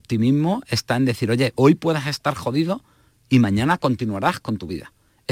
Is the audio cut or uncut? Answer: cut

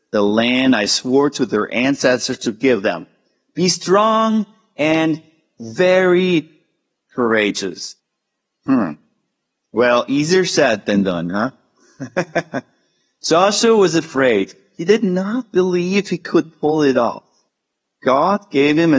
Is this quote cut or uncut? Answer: uncut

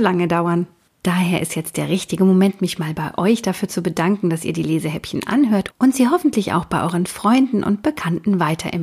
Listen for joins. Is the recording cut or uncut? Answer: uncut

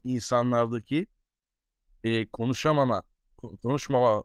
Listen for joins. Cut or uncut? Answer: uncut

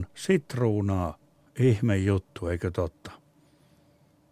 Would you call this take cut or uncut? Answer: cut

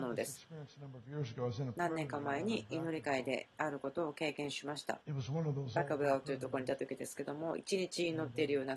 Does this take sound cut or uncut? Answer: cut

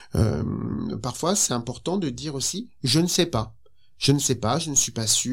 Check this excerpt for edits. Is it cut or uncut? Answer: uncut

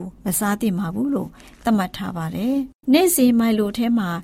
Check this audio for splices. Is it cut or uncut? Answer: cut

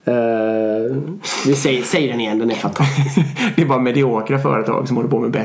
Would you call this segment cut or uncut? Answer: uncut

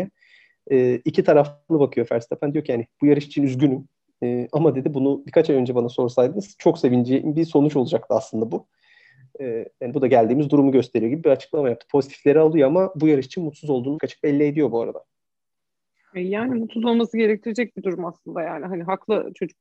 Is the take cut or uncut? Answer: cut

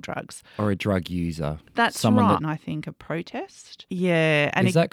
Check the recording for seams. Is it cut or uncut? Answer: cut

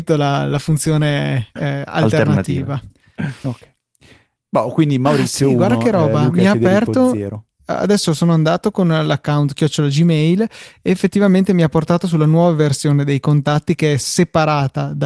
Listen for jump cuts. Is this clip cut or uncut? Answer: uncut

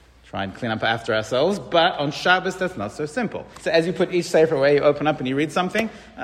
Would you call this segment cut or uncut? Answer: cut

